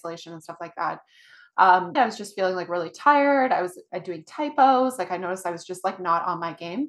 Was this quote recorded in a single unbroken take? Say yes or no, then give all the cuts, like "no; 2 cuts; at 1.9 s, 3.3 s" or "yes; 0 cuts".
no; 1 cut; at 2.0 s